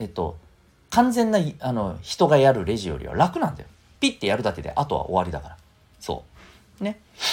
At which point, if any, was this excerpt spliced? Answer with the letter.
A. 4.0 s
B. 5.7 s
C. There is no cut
A